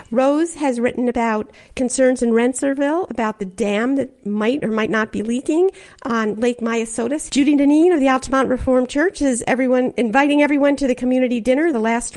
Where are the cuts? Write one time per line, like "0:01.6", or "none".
0:07.3